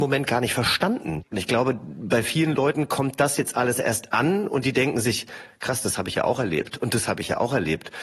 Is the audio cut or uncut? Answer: uncut